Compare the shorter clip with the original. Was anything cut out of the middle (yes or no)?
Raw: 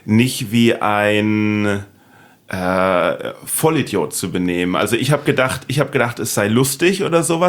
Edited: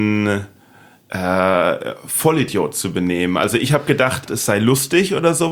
yes